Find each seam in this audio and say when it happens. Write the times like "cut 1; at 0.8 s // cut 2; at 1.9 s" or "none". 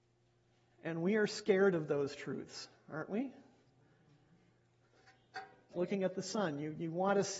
cut 1; at 5.7 s